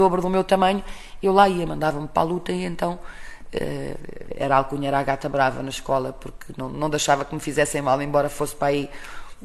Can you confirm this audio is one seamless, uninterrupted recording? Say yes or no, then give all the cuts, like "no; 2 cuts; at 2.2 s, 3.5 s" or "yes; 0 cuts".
yes; 0 cuts